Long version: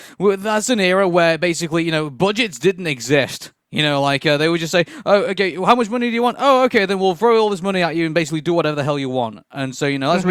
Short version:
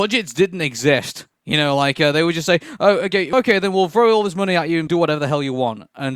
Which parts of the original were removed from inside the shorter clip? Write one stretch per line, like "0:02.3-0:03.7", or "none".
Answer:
0:05.6-0:06.6
0:08.1-0:08.4